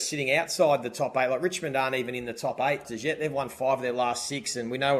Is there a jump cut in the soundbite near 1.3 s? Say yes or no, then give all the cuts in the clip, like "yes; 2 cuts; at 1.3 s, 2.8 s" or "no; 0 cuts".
no; 1 cut; at 2.8 s